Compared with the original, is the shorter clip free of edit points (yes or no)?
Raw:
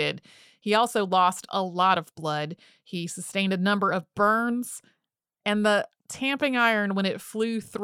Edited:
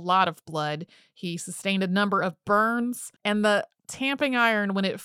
no